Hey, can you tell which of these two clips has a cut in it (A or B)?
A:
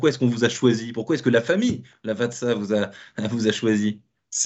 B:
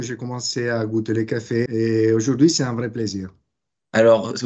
B